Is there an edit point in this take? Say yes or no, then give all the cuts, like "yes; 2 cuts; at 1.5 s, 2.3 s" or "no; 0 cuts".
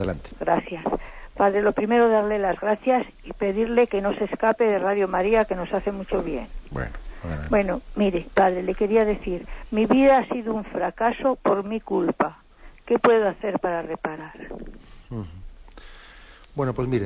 no; 0 cuts